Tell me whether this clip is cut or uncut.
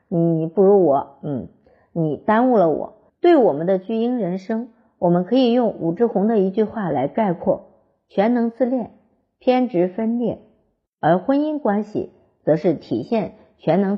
cut